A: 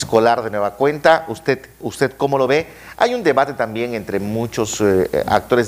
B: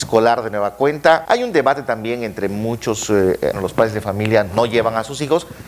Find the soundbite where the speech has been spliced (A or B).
B